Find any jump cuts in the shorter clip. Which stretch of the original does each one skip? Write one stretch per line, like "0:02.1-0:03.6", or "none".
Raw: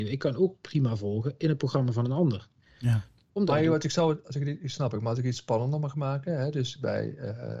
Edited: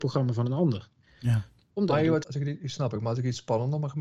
0:03.8-0:04.2